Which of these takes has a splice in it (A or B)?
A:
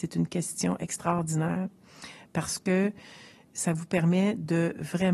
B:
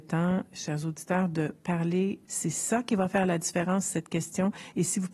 B